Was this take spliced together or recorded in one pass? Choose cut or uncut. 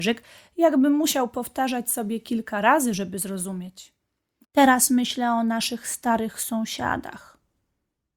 cut